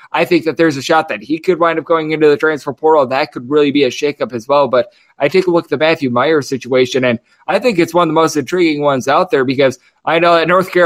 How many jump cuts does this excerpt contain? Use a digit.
0